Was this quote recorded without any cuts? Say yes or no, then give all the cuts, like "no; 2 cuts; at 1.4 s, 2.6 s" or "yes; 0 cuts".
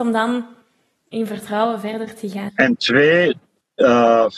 no; 1 cut; at 2.5 s